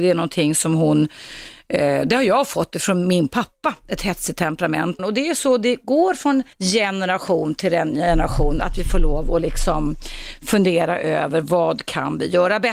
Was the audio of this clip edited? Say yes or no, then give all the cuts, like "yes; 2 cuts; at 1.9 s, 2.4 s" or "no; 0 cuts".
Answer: yes; 2 cuts; at 5.0 s, 6.5 s